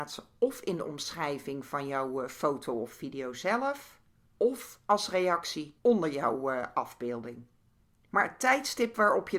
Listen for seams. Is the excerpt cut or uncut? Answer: uncut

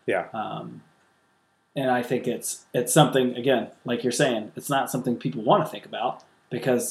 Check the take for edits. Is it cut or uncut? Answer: uncut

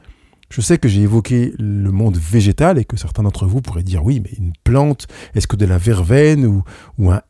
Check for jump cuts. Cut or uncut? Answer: uncut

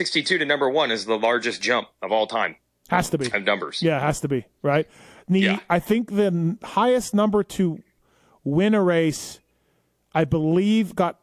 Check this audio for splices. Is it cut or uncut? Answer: uncut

